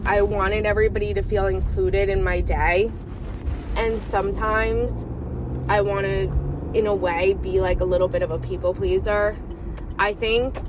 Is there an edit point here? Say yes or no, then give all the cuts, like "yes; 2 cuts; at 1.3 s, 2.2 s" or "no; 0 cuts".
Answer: no; 0 cuts